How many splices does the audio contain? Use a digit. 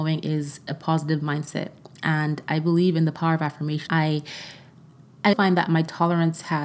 2